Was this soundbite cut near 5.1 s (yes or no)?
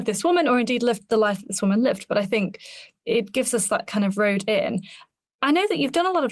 no